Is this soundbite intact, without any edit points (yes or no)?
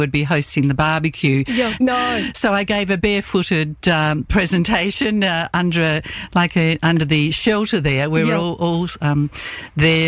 no